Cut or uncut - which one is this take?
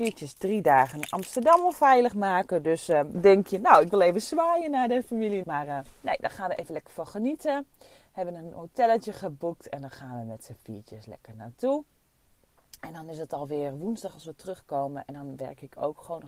cut